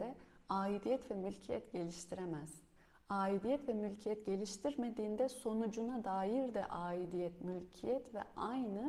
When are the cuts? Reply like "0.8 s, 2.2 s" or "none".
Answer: none